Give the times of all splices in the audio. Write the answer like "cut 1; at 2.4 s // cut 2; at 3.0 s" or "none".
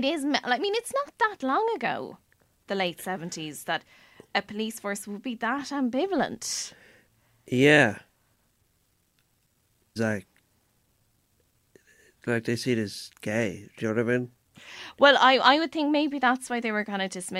cut 1; at 10.0 s